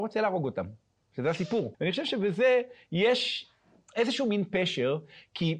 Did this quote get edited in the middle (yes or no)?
yes